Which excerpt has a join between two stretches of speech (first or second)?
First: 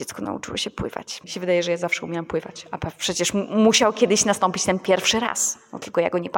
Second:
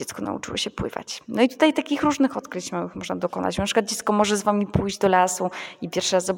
first